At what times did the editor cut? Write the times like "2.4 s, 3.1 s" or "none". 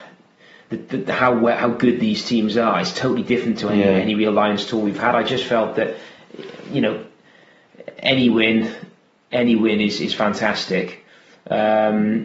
none